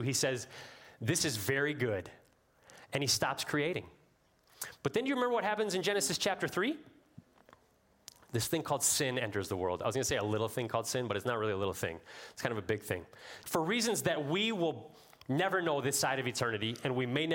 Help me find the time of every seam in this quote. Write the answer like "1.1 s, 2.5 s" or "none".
13.4 s